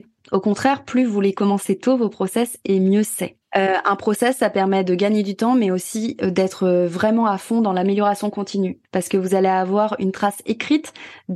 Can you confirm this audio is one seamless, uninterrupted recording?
no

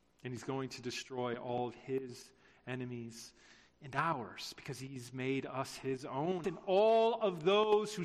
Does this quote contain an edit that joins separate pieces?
yes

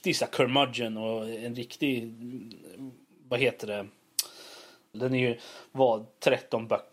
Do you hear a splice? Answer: yes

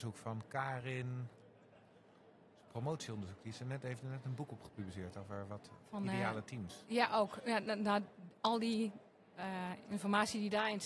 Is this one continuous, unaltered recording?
no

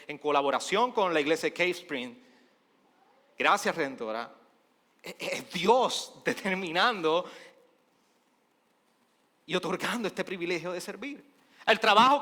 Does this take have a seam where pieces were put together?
no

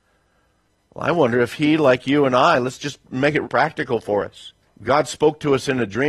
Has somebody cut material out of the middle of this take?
yes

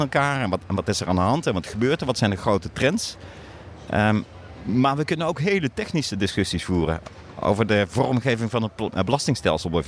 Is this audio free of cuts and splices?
yes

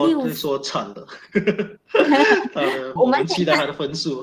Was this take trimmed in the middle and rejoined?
yes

